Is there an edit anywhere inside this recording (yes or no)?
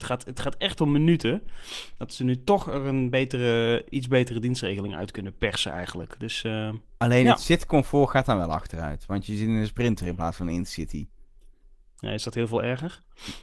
no